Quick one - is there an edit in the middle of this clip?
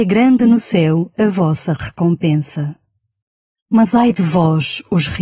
yes; 1 cut; at 3.5 s

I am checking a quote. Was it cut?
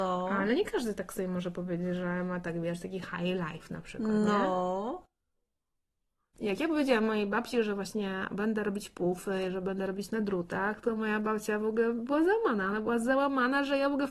yes; 1 cut; at 6.3 s

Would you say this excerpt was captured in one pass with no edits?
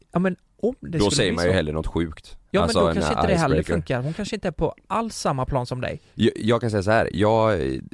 no; 1 cut; at 2.4 s

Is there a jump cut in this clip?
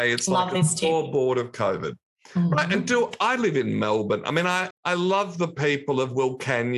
yes; 1 cut; at 4.7 s

